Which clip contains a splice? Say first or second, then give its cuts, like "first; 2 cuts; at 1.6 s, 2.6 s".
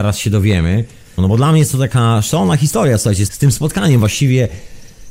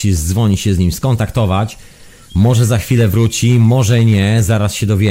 first; 2 cuts; at 1.2 s, 3.3 s